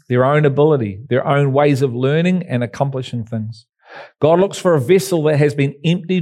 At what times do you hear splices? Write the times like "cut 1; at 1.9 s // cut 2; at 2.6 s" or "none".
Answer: cut 1; at 1.1 s